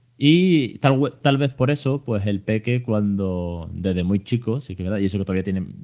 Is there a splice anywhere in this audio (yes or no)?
no